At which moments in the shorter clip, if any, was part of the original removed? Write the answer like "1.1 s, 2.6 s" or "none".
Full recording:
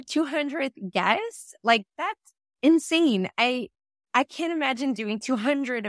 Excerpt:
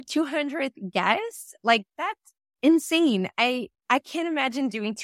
3.8 s

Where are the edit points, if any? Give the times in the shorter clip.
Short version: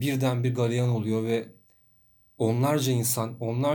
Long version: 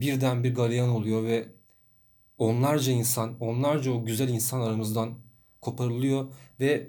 none

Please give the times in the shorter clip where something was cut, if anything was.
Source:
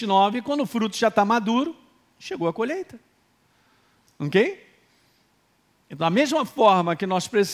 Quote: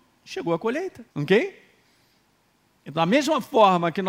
1.1 s

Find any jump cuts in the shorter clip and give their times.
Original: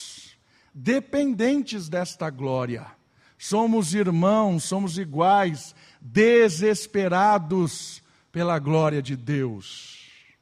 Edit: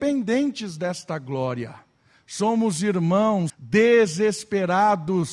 3.5 s

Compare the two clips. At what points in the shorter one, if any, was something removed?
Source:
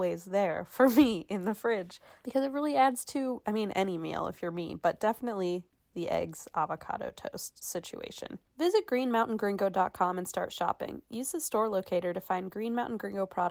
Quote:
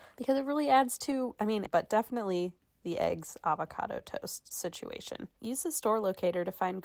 1.7 s, 5.4 s

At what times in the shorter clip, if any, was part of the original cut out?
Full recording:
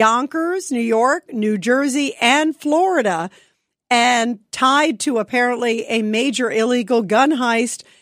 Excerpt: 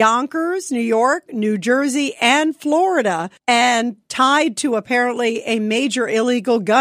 3.4 s

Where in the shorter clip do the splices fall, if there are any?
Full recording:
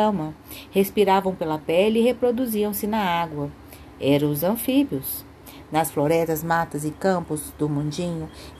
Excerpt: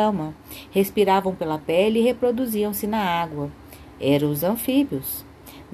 none

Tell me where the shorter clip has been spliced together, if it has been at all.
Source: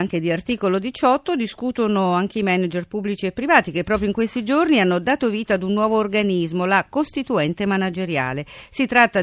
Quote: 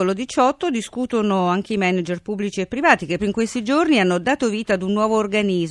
3.2 s

